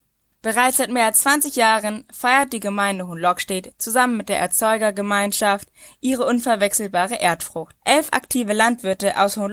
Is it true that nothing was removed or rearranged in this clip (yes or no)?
yes